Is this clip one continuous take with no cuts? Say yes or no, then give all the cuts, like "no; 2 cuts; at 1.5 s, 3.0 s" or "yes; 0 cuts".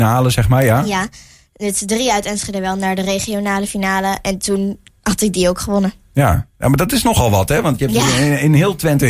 yes; 0 cuts